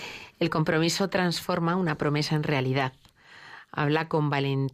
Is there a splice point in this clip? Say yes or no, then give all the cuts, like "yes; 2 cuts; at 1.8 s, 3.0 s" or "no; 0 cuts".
no; 0 cuts